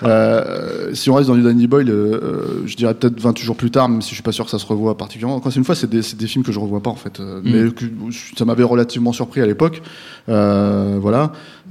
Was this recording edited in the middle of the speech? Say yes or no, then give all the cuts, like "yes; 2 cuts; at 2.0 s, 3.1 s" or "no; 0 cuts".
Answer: no; 0 cuts